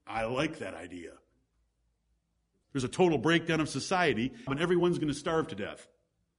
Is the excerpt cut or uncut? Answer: cut